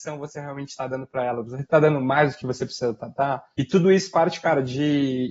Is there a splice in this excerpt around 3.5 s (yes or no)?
yes